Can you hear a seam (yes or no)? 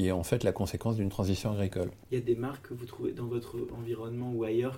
yes